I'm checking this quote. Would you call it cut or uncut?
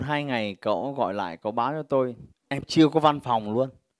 cut